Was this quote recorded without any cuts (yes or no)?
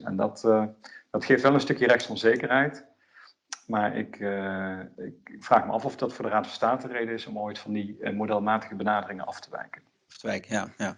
yes